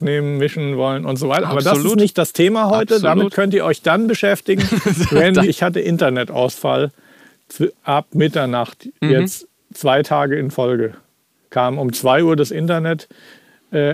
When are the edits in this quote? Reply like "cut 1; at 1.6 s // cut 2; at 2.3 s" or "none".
cut 1; at 5.4 s